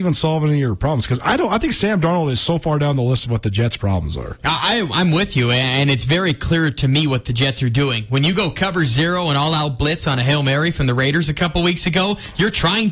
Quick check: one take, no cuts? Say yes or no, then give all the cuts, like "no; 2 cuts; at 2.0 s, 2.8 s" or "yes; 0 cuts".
yes; 0 cuts